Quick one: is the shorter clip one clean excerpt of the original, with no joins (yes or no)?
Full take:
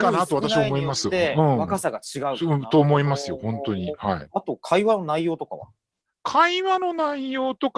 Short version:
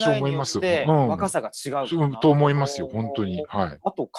yes